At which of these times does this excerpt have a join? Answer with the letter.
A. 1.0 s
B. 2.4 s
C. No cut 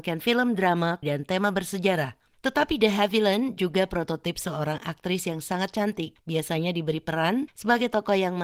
A